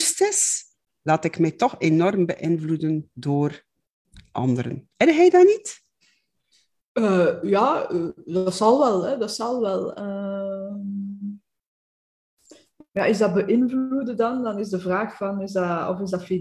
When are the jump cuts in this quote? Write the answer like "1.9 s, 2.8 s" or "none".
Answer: none